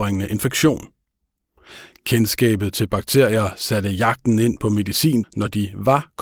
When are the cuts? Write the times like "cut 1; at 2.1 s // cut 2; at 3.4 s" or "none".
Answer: cut 1; at 5.2 s